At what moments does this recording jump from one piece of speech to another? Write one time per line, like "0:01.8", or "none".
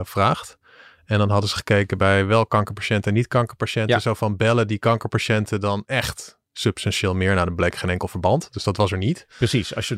none